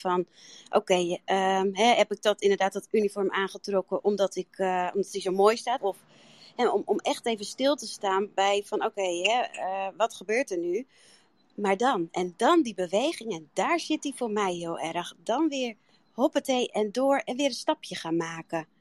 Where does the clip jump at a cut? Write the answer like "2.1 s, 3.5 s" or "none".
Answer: 5.8 s